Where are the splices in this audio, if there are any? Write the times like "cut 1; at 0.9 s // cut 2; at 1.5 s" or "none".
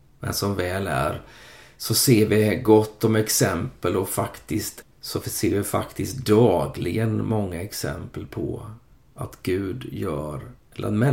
cut 1; at 4.8 s